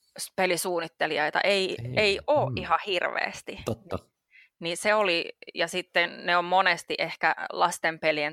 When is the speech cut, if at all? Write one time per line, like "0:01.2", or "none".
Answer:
none

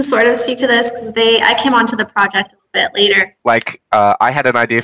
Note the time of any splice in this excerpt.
0:03.4

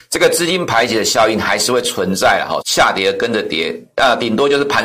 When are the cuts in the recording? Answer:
0:02.6

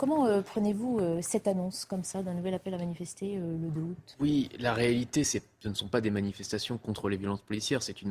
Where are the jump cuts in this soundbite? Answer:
0:05.2

